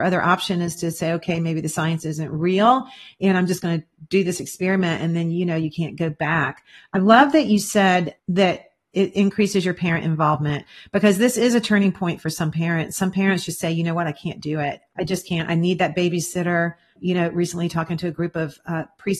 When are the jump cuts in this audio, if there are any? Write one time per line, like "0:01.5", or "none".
none